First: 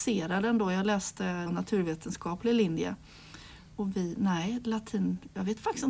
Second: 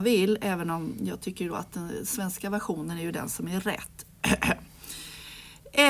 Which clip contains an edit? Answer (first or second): first